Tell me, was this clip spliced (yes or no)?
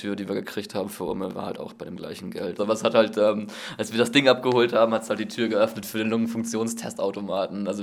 yes